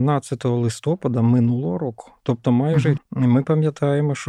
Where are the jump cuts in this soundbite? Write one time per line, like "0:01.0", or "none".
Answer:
0:03.0